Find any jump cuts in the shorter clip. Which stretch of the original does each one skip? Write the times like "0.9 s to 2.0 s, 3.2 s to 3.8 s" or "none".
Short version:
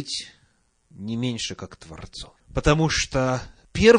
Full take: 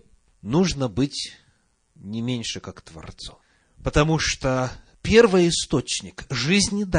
3.5 s to 3.7 s